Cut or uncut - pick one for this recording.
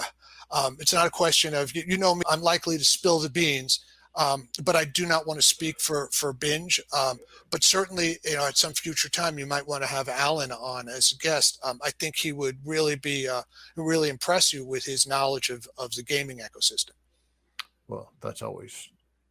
cut